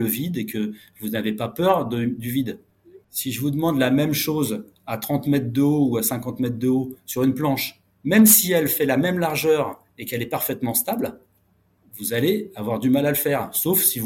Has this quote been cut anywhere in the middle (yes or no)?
yes